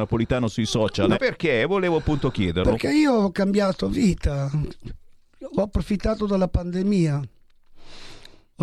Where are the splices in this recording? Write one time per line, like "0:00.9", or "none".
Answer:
0:01.1